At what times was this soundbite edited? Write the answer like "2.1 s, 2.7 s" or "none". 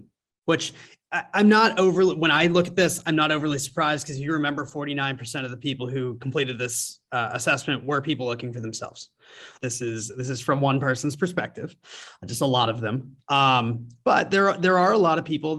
9.6 s